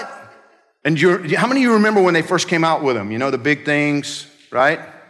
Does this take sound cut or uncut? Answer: uncut